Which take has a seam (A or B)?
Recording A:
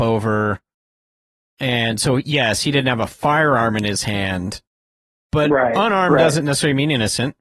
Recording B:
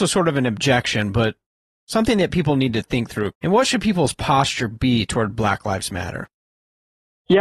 B